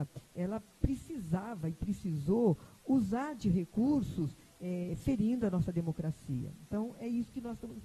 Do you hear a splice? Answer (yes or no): no